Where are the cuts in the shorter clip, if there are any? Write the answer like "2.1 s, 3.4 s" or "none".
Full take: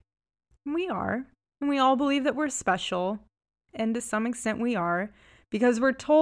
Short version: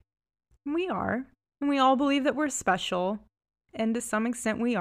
none